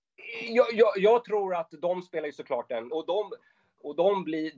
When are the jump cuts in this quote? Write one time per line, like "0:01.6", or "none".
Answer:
0:02.9